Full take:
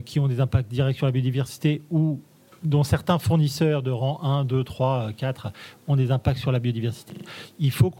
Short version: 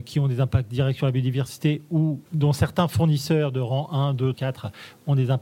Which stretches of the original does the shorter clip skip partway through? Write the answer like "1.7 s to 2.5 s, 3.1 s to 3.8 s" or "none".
2.3 s to 2.6 s, 4.6 s to 5.1 s

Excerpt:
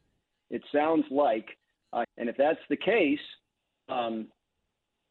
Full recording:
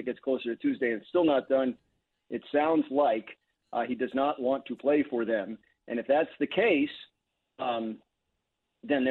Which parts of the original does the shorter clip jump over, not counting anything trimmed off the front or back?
3.8 s to 5.7 s

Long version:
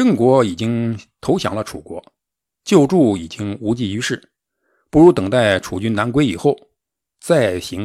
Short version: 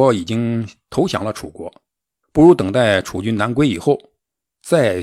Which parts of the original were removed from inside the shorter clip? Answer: 2.5 s to 4.8 s

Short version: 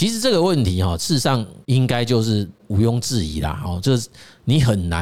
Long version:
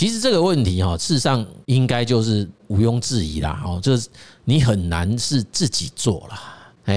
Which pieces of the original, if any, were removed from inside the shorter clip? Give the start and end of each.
none

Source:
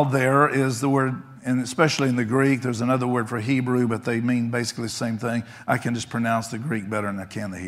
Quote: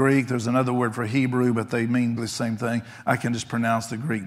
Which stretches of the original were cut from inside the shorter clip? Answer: 4.5 s to 4.8 s

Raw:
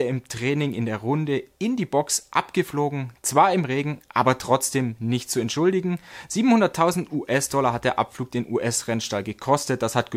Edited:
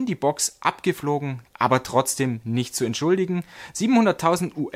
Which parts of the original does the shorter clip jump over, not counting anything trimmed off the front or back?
3.2 s to 4.1 s

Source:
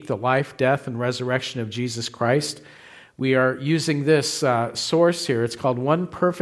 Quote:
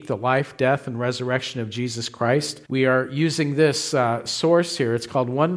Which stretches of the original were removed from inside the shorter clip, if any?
2.6 s to 3.1 s

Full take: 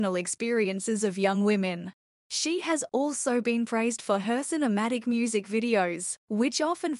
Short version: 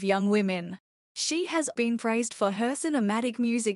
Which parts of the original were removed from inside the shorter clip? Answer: 2.9 s to 3.4 s

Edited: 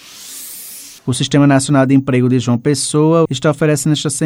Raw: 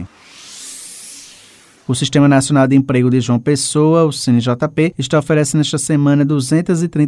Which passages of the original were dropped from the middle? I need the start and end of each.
1.3 s to 1.8 s, 4.1 s to 4.9 s

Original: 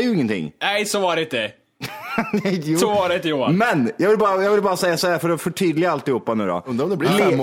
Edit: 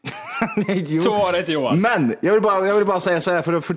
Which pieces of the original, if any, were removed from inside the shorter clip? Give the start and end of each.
none

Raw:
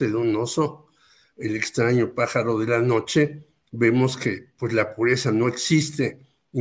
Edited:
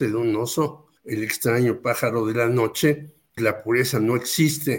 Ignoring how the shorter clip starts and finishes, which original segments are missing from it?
1.0 s to 1.3 s, 3.7 s to 4.7 s

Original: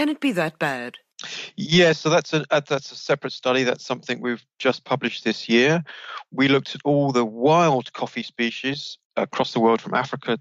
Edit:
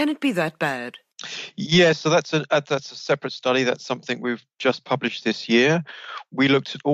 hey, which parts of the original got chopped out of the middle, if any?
none

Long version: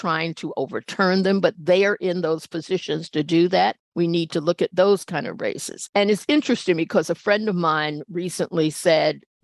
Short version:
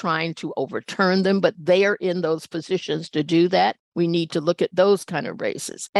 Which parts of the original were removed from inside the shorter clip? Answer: none

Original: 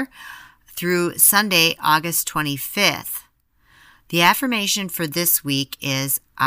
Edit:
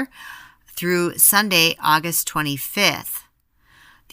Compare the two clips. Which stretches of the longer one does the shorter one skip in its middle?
none

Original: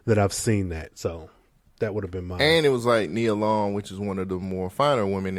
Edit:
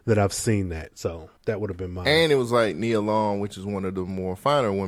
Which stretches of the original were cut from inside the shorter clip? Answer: 1.4 s to 1.7 s

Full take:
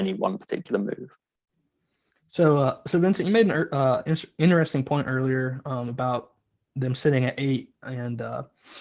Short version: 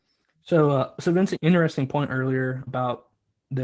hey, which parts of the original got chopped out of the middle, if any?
3.2 s to 4.3 s, 5.6 s to 5.9 s

